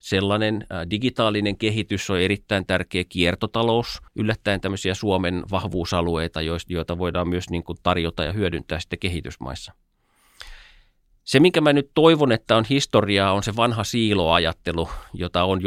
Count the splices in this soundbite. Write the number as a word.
one